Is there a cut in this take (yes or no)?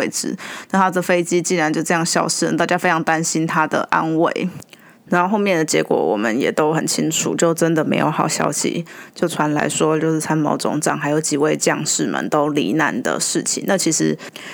no